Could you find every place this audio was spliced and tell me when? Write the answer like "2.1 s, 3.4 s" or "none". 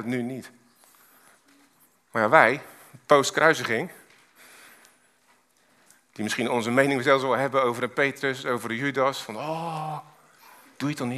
none